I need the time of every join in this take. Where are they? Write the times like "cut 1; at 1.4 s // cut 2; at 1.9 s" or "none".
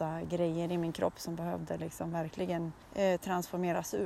cut 1; at 2.8 s